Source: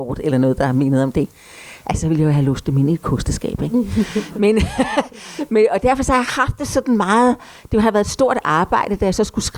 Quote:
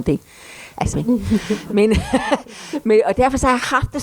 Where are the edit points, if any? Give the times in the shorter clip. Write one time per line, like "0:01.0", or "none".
0:00.9